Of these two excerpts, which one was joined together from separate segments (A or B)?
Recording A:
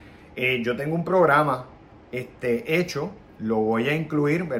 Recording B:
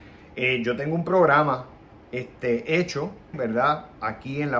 B